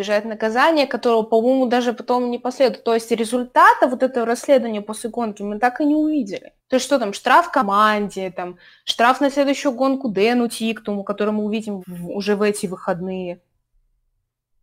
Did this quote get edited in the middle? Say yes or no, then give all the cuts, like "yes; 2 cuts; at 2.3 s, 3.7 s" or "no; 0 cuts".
yes; 2 cuts; at 6.6 s, 11.8 s